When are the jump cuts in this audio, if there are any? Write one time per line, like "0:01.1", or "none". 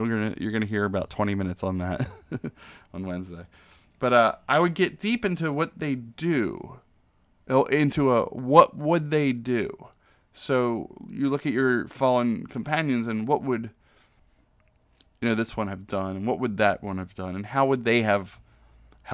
none